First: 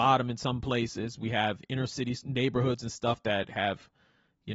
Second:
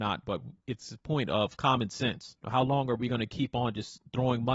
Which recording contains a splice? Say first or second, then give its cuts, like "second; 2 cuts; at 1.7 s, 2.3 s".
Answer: second; 1 cut; at 2.4 s